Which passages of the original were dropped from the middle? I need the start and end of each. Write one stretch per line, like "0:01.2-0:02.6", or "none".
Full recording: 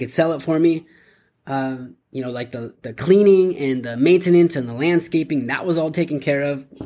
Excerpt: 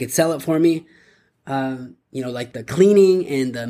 0:02.5-0:02.8